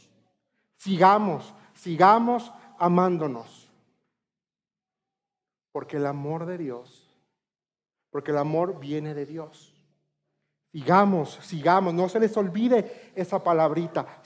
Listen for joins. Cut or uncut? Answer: uncut